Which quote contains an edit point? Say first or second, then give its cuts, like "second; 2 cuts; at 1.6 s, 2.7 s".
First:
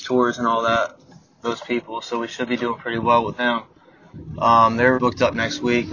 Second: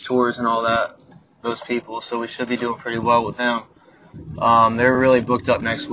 first; 1 cut; at 5.0 s